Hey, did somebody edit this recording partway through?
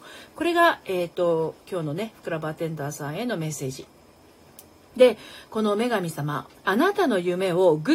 yes; 1 cut; at 6.5 s

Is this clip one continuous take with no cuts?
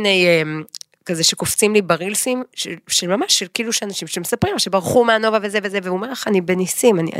yes; 0 cuts

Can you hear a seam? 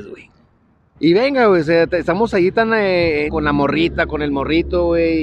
yes; 2 cuts; at 0.9 s, 3.3 s

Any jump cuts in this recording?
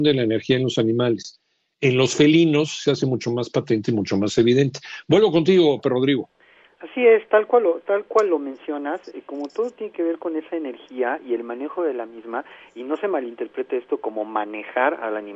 no; 0 cuts

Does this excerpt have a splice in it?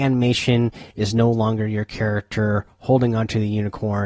no; 0 cuts

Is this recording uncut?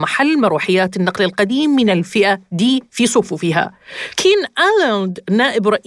yes; 0 cuts

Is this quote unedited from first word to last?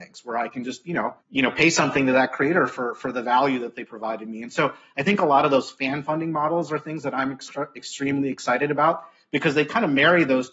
no; 1 cut; at 1.2 s

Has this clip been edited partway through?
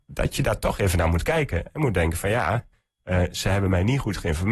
no; 0 cuts

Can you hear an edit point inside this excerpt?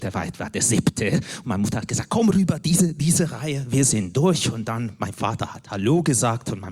no; 0 cuts

